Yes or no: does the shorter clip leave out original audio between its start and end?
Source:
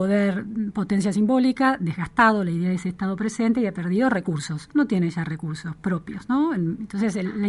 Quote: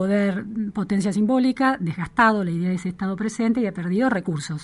no